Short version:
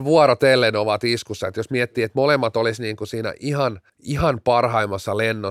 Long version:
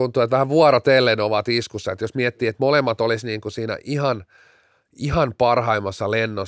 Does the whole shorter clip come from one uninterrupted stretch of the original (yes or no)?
no